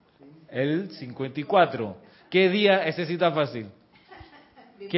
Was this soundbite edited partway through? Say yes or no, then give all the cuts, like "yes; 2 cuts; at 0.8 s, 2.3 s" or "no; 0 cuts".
no; 0 cuts